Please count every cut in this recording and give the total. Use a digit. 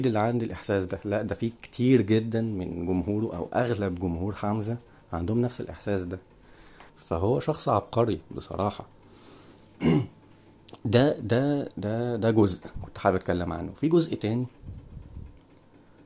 1